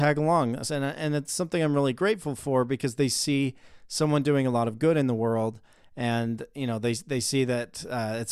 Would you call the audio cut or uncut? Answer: uncut